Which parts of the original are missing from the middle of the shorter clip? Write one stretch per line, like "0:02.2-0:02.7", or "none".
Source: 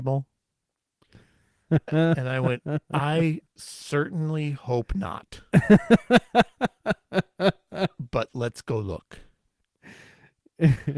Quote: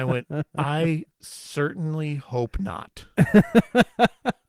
none